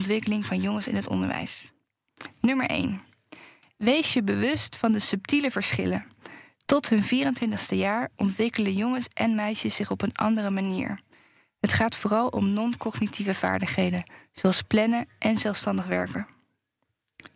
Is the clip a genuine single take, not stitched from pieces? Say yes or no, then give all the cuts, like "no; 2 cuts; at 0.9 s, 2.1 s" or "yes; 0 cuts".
yes; 0 cuts